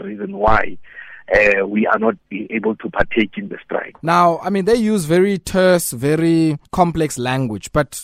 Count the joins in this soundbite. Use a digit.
2